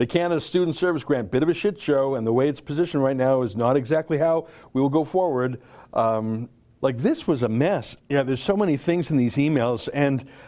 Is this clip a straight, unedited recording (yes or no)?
no